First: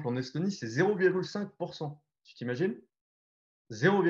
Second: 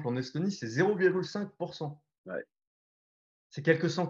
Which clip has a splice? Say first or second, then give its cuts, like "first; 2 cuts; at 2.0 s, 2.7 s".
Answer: second; 1 cut; at 2.2 s